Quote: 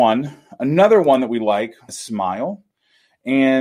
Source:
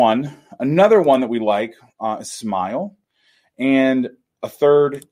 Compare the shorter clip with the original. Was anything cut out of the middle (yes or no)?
yes